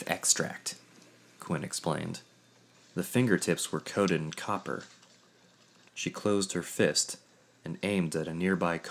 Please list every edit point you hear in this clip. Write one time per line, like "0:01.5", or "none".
0:02.7
0:05.9